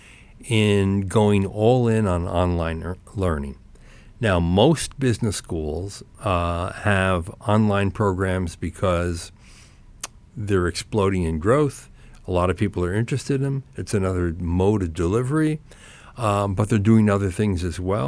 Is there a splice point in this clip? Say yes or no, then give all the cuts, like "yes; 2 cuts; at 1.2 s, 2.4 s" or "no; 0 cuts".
no; 0 cuts